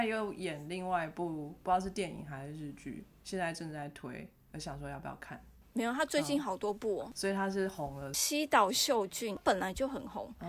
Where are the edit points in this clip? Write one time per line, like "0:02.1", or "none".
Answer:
none